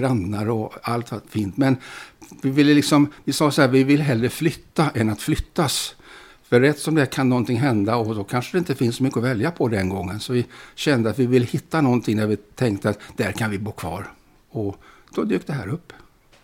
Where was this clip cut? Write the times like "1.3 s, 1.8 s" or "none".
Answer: none